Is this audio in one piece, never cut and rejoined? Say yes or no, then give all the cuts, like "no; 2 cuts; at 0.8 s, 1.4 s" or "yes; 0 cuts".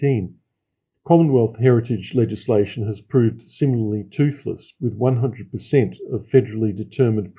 yes; 0 cuts